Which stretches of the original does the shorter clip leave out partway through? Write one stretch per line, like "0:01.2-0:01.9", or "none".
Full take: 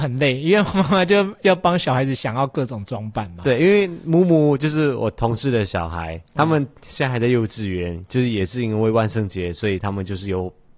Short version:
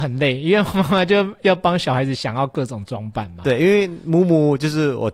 none